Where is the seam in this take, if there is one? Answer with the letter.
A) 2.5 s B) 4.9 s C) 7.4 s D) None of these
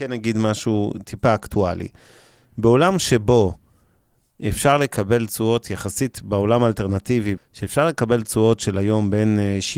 C